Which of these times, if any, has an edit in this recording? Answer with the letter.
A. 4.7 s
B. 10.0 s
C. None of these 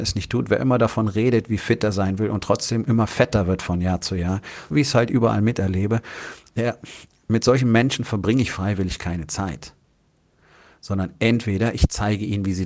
A